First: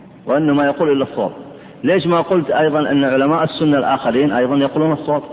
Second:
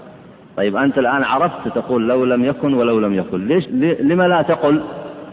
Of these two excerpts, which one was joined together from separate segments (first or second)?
second